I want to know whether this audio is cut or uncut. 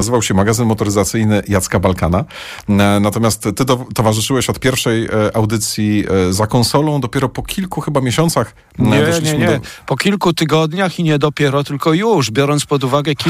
uncut